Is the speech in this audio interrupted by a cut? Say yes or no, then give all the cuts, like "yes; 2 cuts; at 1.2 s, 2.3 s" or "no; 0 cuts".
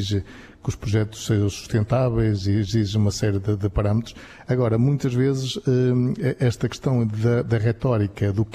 no; 0 cuts